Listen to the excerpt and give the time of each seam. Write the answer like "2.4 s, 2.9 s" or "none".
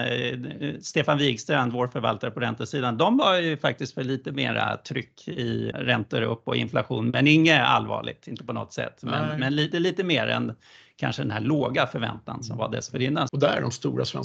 5.7 s, 9.7 s, 13.3 s